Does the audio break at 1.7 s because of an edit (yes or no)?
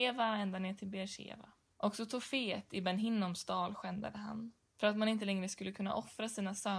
yes